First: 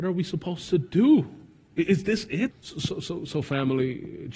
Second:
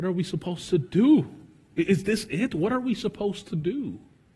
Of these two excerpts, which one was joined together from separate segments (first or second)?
first